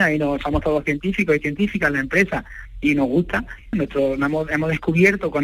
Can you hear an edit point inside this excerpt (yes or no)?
yes